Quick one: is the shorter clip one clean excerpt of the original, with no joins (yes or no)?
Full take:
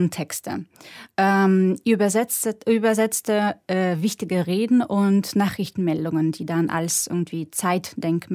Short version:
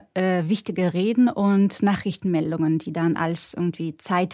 yes